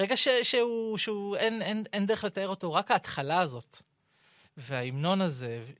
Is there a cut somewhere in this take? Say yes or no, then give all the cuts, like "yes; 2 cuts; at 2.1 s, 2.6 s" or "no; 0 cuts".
no; 0 cuts